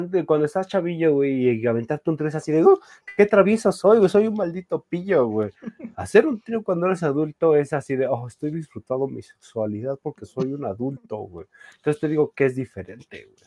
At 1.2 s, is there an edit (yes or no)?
no